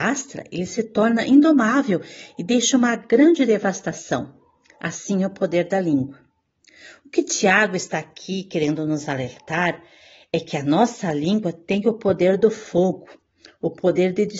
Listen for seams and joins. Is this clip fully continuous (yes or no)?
yes